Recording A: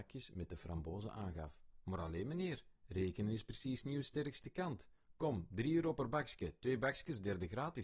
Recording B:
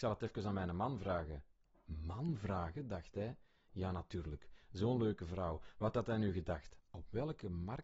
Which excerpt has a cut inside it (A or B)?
B